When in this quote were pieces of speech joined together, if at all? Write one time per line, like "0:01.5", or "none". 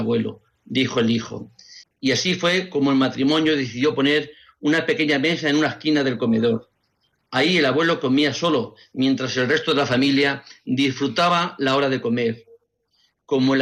0:01.8